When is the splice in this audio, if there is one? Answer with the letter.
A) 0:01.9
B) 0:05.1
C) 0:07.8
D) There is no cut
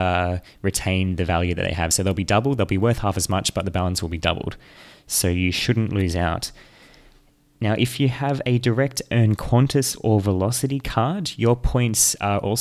D